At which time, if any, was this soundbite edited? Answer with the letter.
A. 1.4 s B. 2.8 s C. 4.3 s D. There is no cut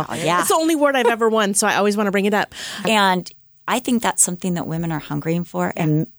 B